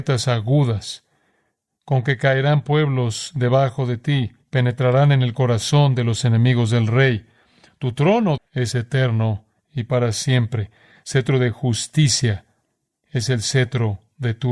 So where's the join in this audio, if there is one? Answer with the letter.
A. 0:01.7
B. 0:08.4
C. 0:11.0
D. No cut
B